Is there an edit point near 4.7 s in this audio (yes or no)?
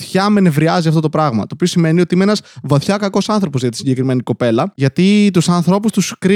yes